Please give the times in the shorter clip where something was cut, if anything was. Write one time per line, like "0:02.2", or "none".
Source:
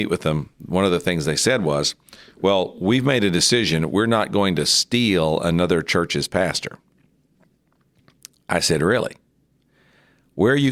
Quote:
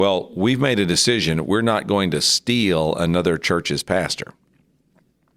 none